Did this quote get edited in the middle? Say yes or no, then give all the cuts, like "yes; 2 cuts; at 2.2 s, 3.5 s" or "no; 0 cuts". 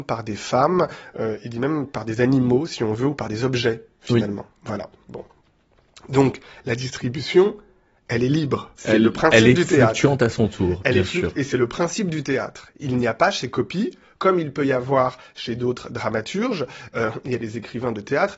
yes; 1 cut; at 8.8 s